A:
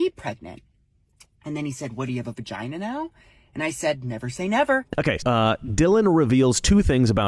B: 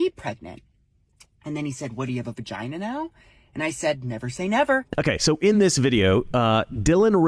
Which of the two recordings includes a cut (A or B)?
A